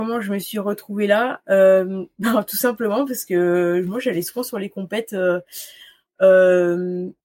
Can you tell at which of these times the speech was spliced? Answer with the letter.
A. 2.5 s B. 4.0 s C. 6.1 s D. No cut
D